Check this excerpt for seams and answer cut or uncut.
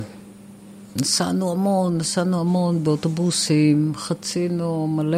uncut